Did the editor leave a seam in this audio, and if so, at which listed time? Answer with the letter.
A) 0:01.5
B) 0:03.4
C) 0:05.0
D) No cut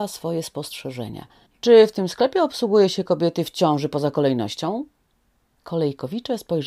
A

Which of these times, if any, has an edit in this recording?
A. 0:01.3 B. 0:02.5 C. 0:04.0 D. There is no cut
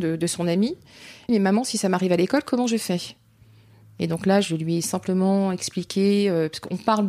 A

